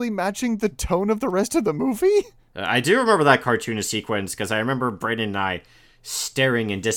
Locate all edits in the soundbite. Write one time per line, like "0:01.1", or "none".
none

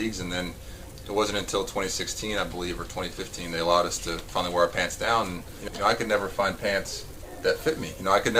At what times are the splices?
0:05.7

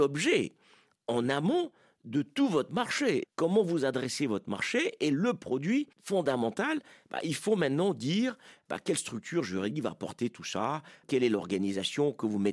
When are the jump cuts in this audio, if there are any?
0:03.2
0:05.9

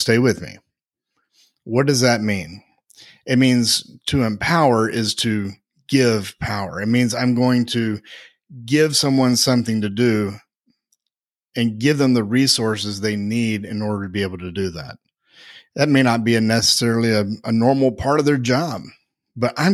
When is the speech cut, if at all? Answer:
none

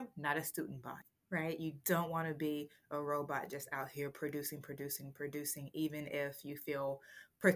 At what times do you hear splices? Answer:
none

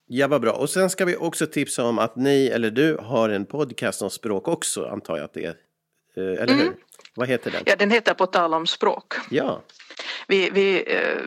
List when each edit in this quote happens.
none

